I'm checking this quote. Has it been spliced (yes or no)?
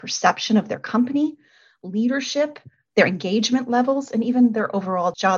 no